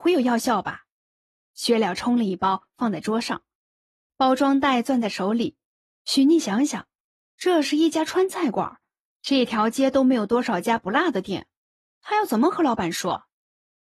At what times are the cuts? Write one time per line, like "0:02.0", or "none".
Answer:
0:06.0